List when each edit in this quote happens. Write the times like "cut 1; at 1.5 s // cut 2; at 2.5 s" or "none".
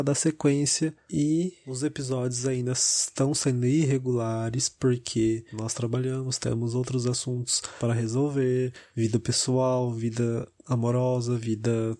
none